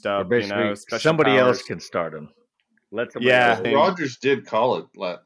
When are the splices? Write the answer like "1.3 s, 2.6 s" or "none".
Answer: 3.6 s

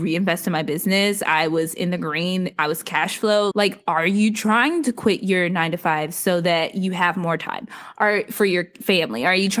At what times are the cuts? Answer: 3.5 s

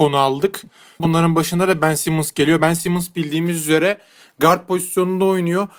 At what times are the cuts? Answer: 1.0 s

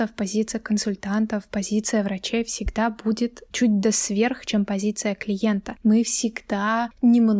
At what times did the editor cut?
3.5 s

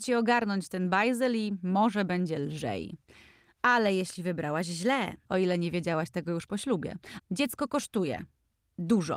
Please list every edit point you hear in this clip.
5.3 s, 7.2 s

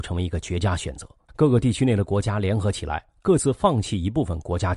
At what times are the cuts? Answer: 1.3 s

